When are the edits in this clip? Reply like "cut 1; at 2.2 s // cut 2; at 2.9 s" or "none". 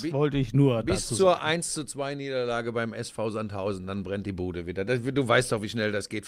none

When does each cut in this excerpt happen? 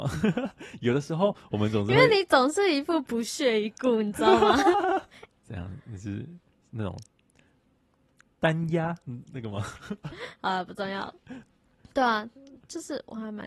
cut 1; at 5.3 s

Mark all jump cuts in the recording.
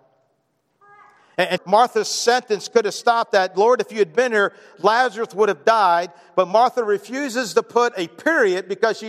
cut 1; at 1.6 s

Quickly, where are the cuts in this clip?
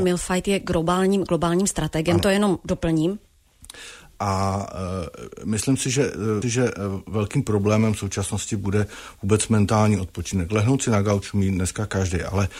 cut 1; at 6.4 s

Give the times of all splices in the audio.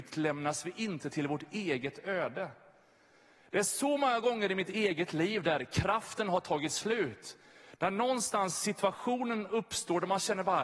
none

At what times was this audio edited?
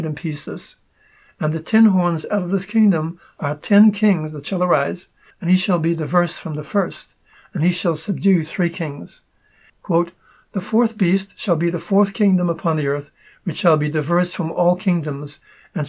cut 1; at 5.3 s // cut 2; at 9.7 s

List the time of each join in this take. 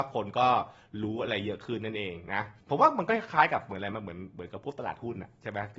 cut 1; at 2.6 s

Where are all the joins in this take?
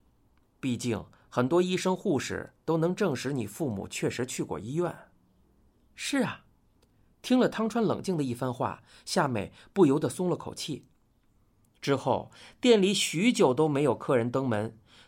none

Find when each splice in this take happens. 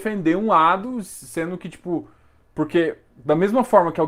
none

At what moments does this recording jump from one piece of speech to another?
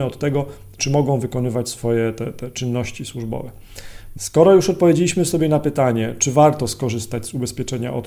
cut 1; at 4.1 s

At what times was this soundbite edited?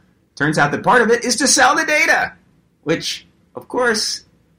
none

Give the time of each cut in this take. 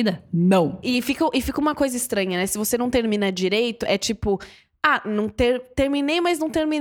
none

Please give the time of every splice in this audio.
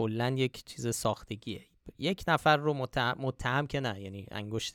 none

